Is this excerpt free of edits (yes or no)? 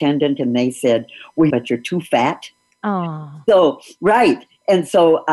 no